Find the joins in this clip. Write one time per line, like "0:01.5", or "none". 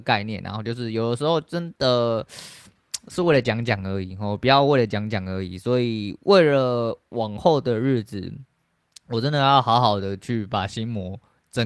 none